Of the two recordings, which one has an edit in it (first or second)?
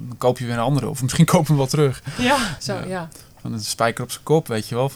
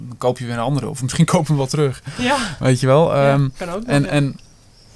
first